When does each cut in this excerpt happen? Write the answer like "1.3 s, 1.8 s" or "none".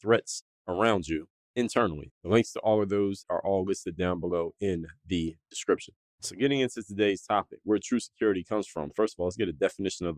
2.1 s, 3.2 s